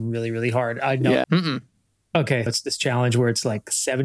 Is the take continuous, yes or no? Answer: no